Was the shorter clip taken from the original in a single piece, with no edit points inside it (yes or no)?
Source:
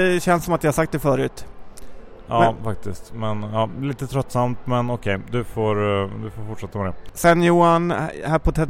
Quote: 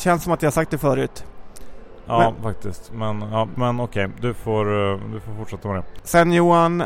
no